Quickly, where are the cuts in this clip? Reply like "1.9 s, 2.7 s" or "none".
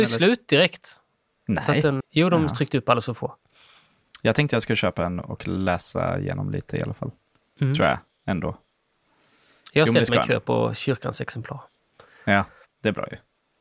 2.0 s